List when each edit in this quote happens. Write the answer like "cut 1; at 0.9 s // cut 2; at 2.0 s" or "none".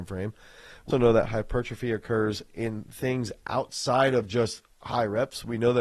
cut 1; at 0.9 s